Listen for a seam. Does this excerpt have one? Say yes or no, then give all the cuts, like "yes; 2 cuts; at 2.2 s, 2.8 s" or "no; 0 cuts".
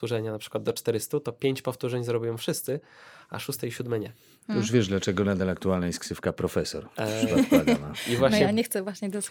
no; 0 cuts